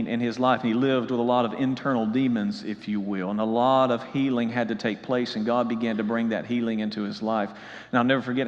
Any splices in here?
no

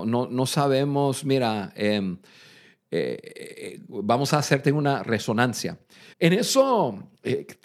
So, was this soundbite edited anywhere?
yes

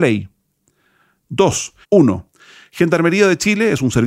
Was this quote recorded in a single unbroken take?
no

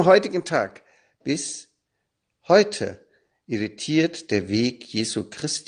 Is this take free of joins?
yes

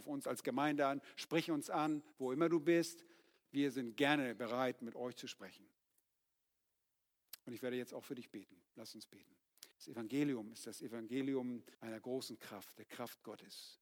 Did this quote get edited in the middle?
yes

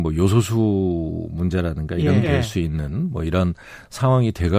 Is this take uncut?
no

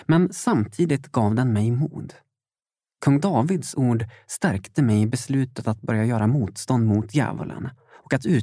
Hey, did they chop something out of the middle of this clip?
no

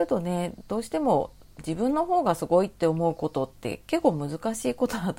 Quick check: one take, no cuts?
no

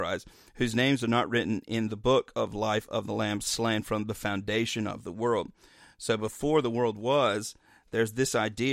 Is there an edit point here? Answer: no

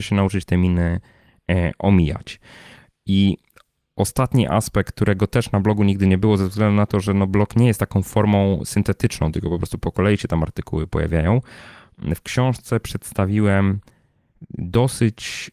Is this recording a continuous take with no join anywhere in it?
yes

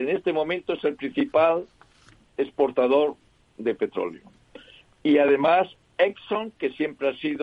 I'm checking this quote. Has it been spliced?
no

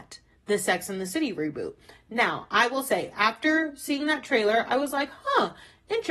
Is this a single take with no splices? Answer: yes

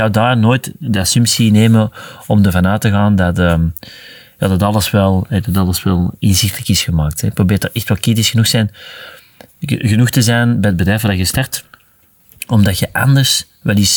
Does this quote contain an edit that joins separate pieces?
no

